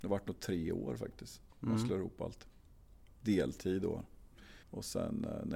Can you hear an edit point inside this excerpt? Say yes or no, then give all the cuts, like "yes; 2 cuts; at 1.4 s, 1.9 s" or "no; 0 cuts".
yes; 1 cut; at 4.6 s